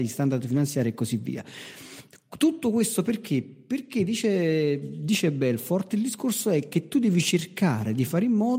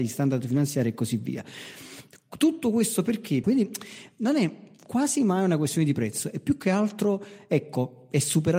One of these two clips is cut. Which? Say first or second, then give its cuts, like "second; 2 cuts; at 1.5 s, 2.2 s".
second; 1 cut; at 3.4 s